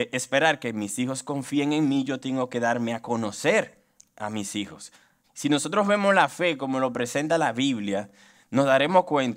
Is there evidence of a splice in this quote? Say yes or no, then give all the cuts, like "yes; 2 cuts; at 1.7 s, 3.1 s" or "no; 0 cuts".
yes; 1 cut; at 5.2 s